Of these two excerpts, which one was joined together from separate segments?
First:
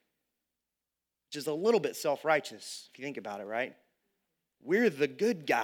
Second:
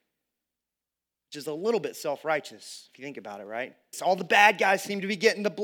second; 1 cut; at 3.9 s

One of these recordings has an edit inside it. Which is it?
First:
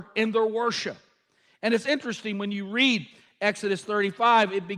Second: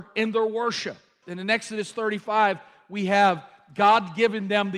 second; 1 cut; at 1.2 s

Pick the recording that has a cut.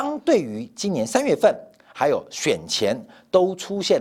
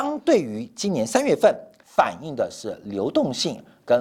second; 1 cut; at 1.8 s

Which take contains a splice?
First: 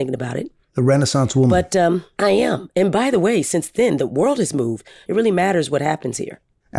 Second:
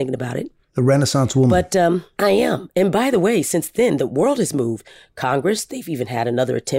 first; 1 cut; at 5.0 s

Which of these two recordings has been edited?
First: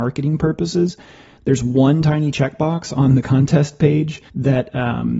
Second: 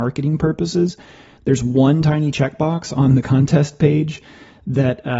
first; 1 cut; at 4.3 s

